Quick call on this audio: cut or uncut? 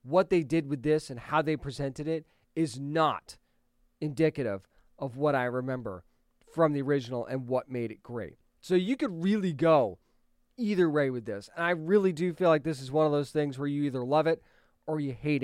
uncut